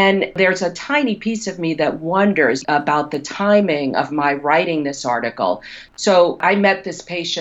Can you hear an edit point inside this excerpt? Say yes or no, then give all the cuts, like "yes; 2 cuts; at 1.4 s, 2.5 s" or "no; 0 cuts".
no; 0 cuts